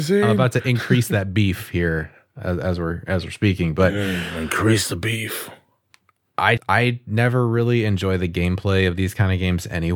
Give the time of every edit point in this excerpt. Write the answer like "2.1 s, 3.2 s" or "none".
6.6 s